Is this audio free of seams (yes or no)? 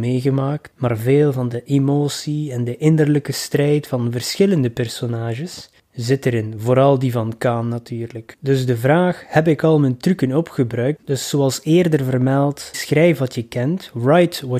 no